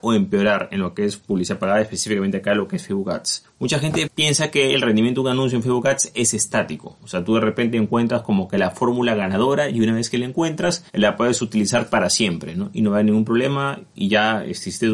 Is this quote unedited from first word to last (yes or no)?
no